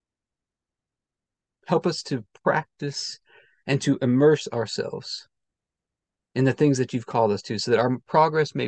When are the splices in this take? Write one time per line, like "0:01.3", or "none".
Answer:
none